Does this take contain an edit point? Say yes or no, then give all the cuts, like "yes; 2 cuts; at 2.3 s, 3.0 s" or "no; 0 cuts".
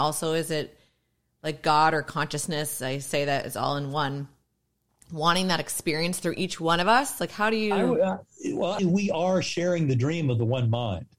yes; 1 cut; at 8.8 s